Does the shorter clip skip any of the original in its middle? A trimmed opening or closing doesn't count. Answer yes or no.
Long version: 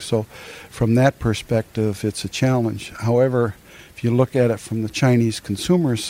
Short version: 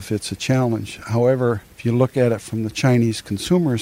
yes